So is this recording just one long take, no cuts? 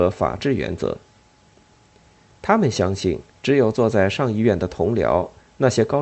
no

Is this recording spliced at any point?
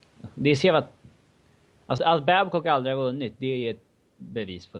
yes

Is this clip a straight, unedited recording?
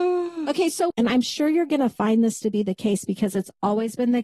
no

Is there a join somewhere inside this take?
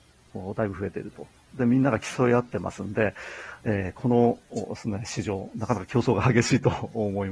no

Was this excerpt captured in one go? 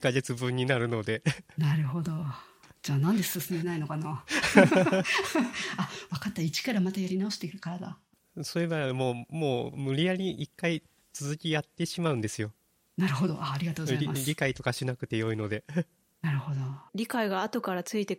no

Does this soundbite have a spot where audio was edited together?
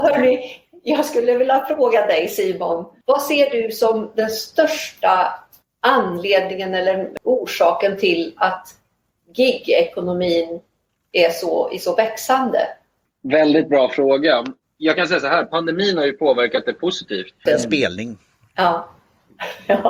yes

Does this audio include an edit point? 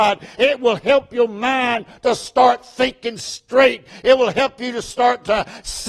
no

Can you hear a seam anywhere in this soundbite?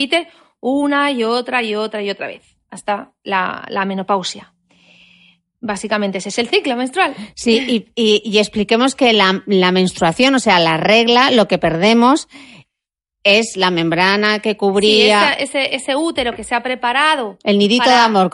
no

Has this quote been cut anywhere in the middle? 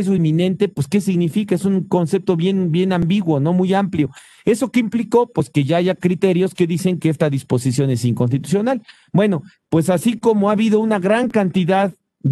no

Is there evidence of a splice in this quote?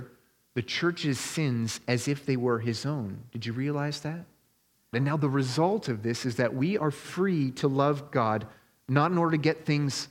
yes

